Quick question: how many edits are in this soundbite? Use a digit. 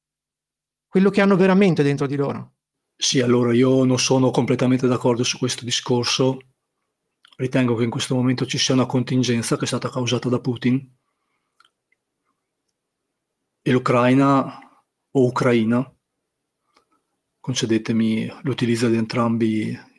0